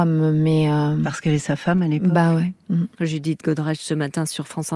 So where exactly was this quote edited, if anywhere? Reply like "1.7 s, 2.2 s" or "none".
2.9 s